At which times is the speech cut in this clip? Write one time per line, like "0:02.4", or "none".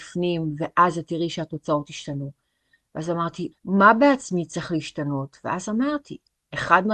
0:03.5

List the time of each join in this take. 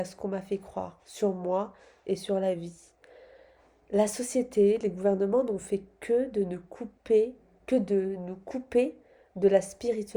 none

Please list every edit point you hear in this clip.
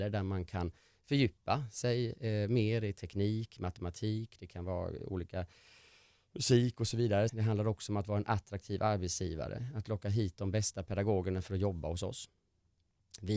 0:07.3

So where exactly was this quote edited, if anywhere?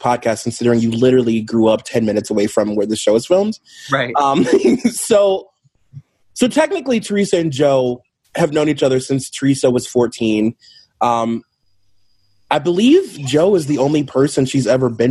none

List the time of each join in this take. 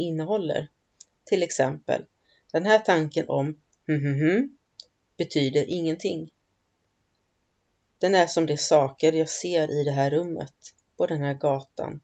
none

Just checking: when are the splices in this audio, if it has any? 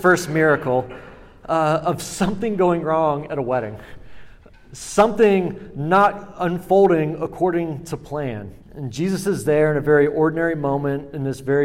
0:08.6

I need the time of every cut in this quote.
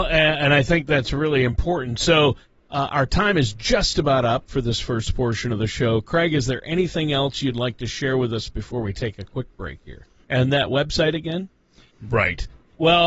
0:10.2
0:11.9

